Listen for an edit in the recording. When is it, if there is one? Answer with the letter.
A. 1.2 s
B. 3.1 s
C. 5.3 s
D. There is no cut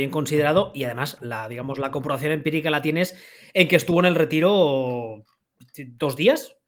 A